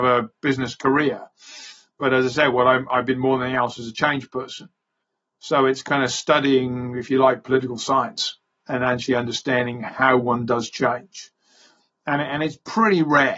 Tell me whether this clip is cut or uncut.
uncut